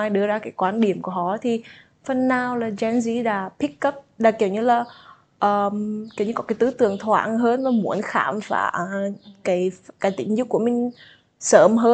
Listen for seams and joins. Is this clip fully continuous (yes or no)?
yes